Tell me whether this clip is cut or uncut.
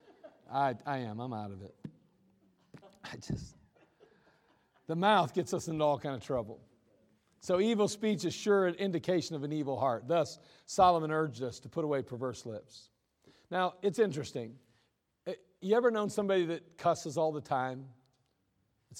uncut